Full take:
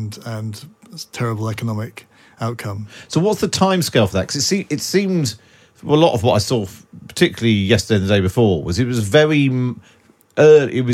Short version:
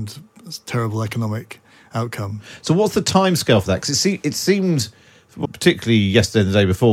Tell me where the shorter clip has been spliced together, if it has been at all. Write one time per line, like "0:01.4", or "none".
0:05.4